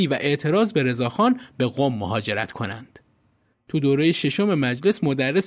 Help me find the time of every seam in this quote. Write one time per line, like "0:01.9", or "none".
0:03.5